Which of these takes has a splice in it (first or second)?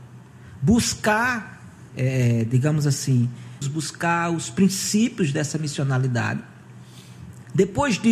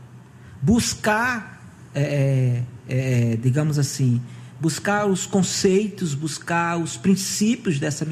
first